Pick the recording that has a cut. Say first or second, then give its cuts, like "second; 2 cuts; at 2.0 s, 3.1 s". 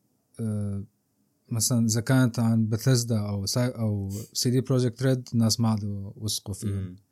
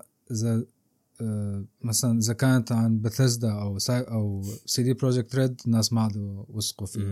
second; 1 cut; at 1.7 s